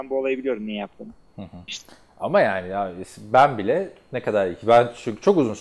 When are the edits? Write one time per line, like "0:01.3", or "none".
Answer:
0:01.7